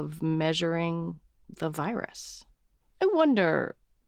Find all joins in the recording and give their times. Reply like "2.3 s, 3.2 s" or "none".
2.8 s